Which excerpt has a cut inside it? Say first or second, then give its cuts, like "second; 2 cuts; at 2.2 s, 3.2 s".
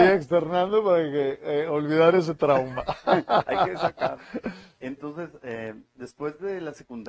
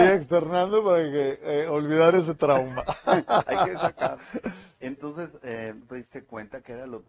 second; 1 cut; at 5.8 s